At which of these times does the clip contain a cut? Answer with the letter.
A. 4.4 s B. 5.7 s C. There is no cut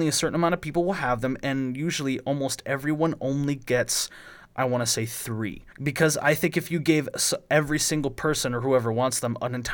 B